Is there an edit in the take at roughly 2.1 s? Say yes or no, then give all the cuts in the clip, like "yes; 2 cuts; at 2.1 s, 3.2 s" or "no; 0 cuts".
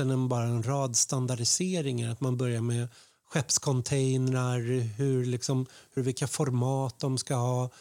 no; 1 cut; at 6.0 s